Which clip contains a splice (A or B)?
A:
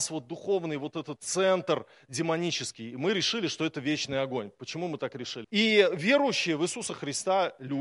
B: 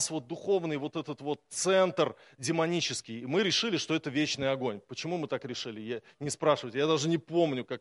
A